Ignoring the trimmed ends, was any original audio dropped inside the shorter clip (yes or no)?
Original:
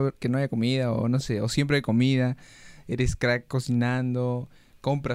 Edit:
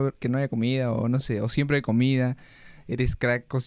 no